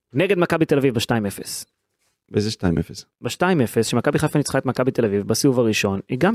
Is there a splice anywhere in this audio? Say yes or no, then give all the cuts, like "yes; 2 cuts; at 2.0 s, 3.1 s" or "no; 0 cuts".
no; 0 cuts